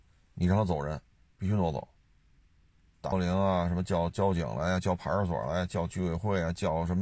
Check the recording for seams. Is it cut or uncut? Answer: cut